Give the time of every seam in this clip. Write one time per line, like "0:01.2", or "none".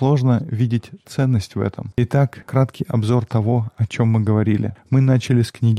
0:01.9